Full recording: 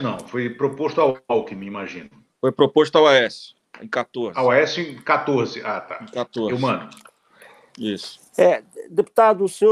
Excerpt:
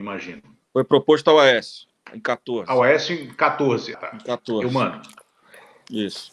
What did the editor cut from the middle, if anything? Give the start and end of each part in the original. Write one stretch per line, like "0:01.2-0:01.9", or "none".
0:05.6-0:05.8